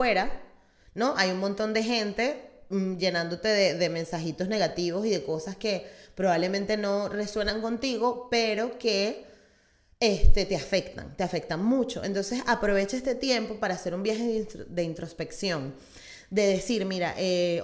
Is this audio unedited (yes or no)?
yes